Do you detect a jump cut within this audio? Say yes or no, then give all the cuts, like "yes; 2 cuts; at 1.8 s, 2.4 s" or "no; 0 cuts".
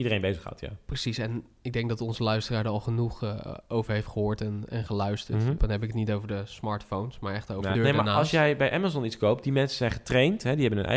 yes; 2 cuts; at 5.6 s, 7.7 s